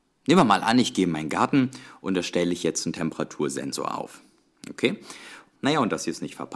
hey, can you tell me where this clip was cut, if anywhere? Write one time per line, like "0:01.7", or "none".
0:05.5